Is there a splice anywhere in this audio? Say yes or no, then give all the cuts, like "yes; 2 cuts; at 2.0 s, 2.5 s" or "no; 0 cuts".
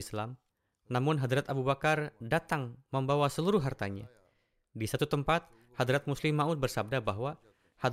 no; 0 cuts